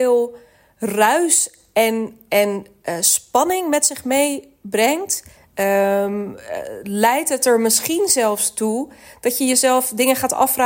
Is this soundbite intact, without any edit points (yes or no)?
no